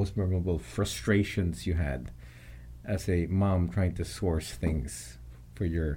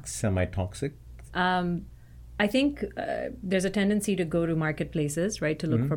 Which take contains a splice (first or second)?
second